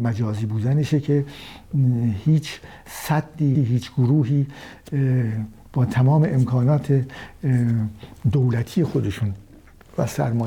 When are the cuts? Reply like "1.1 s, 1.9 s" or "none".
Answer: 3.6 s